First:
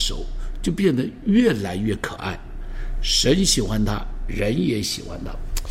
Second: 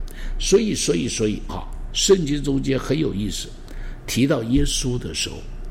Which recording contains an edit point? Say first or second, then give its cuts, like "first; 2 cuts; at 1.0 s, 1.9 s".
second; 1 cut; at 1.5 s